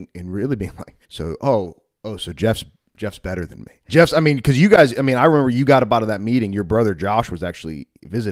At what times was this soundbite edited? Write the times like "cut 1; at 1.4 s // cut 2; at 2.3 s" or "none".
cut 1; at 1.0 s // cut 2; at 3.9 s